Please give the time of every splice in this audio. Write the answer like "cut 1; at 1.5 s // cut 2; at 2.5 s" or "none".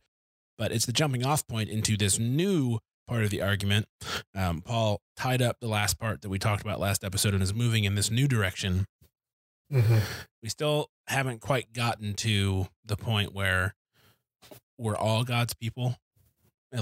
cut 1; at 9.6 s